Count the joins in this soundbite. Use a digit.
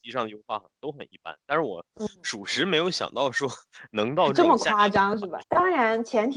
1